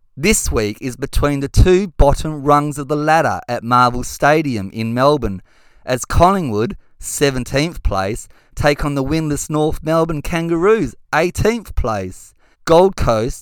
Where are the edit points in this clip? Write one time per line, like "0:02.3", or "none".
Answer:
0:12.5